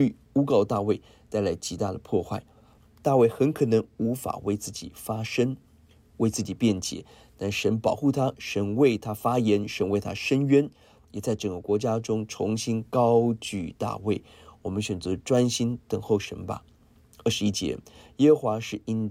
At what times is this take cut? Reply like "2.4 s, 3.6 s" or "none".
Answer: none